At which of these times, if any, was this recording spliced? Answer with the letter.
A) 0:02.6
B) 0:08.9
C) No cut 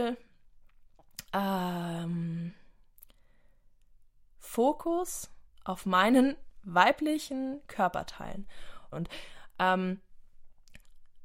B